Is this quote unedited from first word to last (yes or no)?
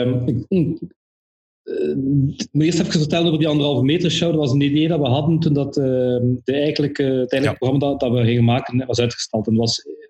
yes